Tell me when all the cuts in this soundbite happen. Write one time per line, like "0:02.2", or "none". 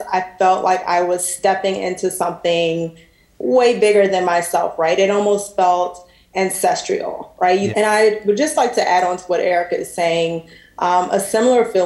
0:07.7